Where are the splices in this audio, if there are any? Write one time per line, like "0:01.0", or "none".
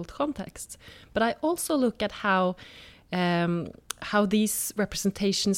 none